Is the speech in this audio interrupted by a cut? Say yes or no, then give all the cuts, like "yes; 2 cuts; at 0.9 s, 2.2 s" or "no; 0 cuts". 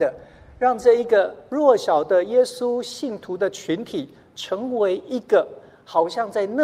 no; 0 cuts